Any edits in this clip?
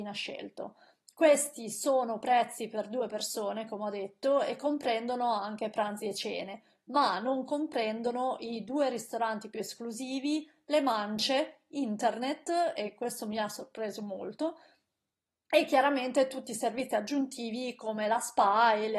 no; 0 cuts

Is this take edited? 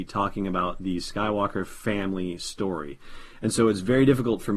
no; 0 cuts

